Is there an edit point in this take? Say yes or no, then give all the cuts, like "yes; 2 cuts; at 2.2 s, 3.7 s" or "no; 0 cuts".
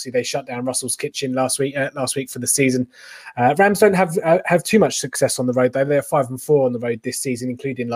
no; 0 cuts